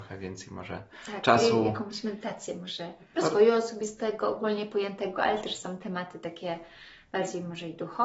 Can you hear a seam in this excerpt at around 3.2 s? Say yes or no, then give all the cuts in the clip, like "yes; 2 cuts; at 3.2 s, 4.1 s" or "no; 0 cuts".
yes; 1 cut; at 3.2 s